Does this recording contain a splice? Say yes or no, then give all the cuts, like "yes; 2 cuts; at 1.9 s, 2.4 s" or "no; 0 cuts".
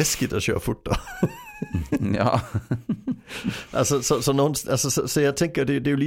no; 0 cuts